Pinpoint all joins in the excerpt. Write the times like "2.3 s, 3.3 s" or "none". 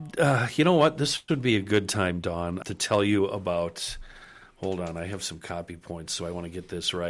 2.6 s